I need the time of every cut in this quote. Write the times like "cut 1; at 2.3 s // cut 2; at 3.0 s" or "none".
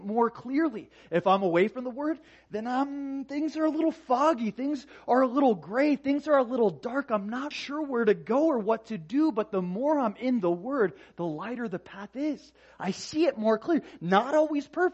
cut 1; at 7.5 s